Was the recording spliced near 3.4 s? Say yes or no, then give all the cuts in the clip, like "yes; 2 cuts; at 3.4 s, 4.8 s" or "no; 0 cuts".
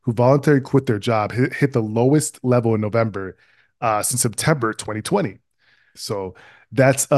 no; 1 cut; at 6.0 s